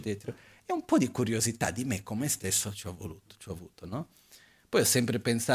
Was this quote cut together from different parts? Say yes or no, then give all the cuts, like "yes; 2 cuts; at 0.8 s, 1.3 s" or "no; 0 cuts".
no; 0 cuts